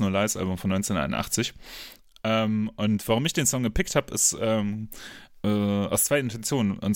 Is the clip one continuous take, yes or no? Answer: yes